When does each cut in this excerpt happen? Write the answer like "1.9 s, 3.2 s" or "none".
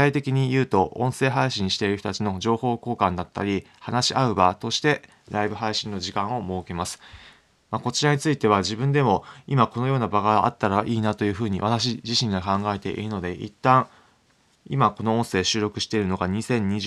7.7 s